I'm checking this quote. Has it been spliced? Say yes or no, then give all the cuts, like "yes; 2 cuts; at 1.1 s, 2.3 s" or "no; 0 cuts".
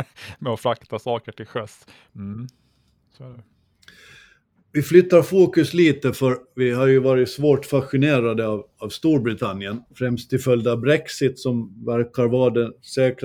yes; 2 cuts; at 2.1 s, 9.9 s